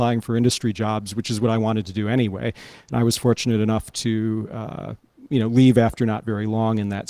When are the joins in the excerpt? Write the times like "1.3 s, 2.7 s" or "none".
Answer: none